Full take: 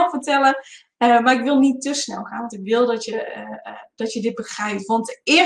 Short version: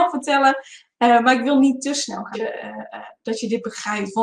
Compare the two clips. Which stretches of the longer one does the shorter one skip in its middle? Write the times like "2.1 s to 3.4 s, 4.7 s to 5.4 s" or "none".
2.3 s to 3.1 s